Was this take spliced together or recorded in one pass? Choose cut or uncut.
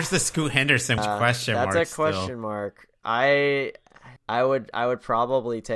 cut